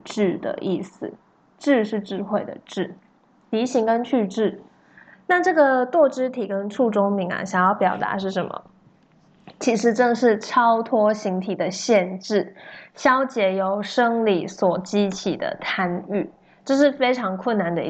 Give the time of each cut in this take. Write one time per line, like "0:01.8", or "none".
none